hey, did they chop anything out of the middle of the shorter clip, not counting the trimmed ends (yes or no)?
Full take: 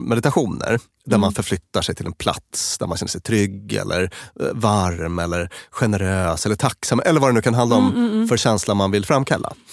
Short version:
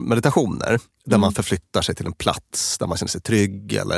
no